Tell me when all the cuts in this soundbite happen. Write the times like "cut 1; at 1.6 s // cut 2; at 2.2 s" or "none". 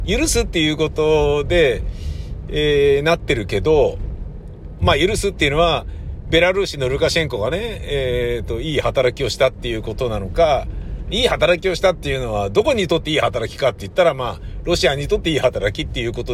cut 1; at 4.8 s